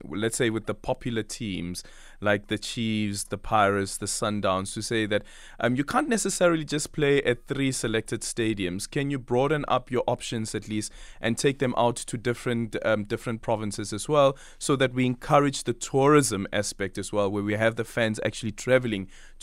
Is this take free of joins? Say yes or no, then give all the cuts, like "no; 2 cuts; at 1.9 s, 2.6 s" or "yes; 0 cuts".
yes; 0 cuts